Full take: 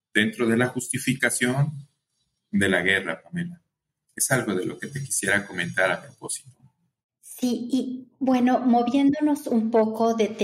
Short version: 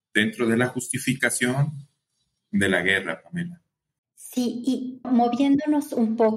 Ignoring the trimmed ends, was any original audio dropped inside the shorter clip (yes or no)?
yes